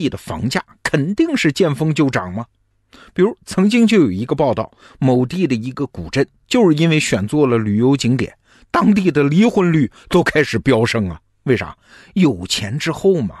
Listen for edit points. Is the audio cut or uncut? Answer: uncut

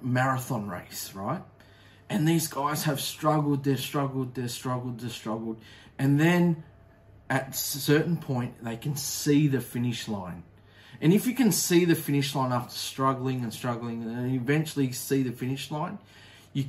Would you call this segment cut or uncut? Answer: uncut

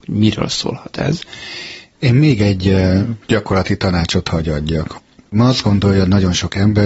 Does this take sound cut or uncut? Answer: cut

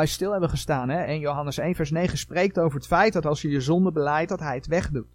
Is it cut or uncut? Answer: uncut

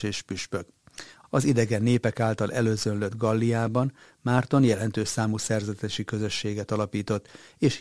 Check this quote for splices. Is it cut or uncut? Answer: cut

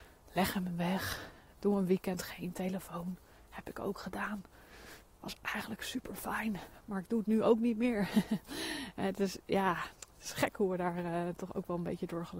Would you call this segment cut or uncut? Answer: uncut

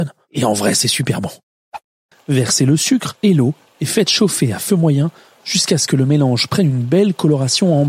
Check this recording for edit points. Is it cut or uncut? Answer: cut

